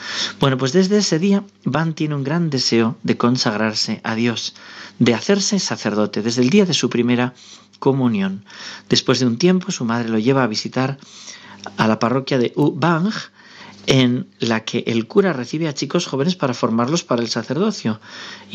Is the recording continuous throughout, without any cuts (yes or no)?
yes